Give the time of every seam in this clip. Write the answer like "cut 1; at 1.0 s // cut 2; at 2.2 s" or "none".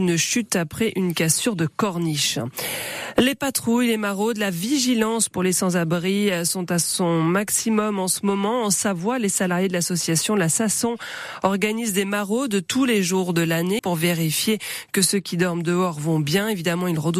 cut 1; at 13.8 s